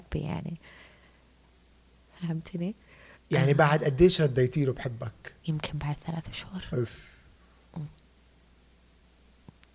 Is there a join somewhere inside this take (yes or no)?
yes